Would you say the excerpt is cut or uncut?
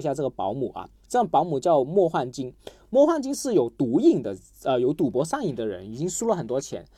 uncut